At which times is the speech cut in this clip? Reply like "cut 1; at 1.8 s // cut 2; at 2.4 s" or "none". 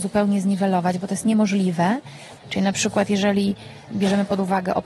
cut 1; at 2.4 s // cut 2; at 3.9 s